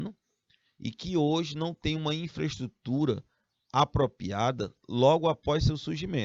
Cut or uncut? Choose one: uncut